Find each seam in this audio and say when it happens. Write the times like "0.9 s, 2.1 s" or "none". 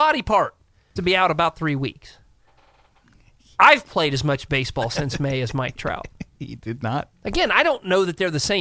1.0 s, 7.1 s